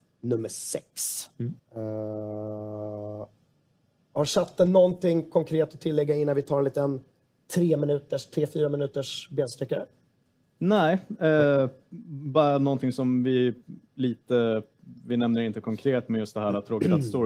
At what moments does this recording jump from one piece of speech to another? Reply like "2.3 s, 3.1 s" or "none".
1.6 s